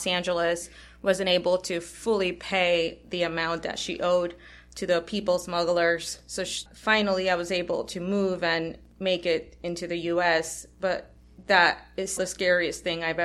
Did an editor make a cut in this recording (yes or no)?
yes